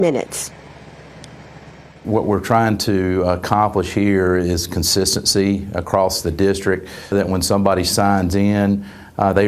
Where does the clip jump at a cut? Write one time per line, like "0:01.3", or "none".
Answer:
0:07.1